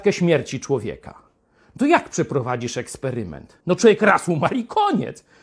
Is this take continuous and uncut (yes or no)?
no